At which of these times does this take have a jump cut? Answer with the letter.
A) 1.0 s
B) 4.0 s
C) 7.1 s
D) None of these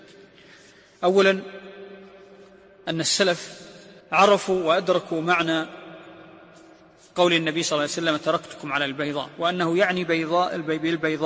B